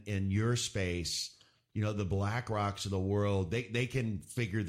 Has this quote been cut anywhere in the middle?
no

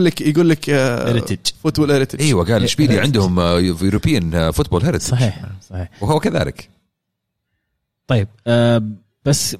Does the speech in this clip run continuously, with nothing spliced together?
yes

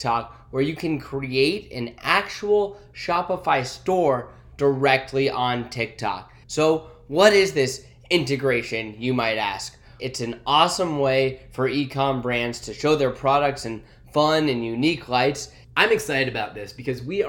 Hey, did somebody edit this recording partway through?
yes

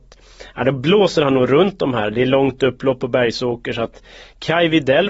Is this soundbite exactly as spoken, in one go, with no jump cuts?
yes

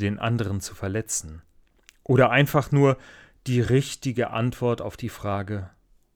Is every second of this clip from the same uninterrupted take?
yes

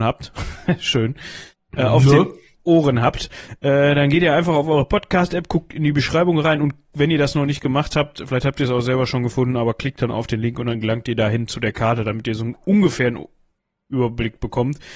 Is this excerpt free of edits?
yes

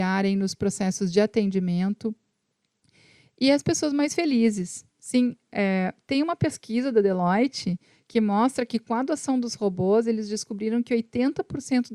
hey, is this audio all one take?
yes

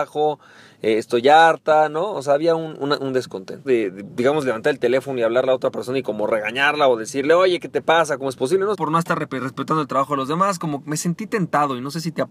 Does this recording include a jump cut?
yes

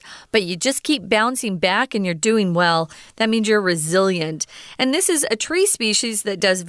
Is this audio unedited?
yes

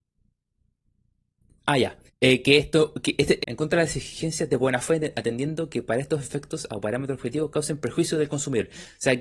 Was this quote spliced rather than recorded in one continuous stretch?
yes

